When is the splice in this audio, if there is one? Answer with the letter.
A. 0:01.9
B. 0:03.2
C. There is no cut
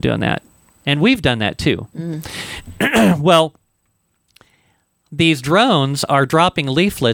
A